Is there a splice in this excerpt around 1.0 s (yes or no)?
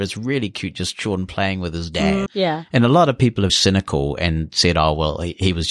no